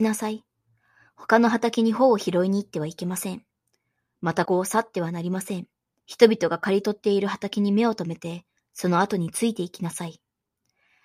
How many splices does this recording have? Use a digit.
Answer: 2